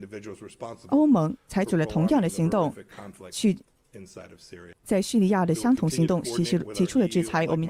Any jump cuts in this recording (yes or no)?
yes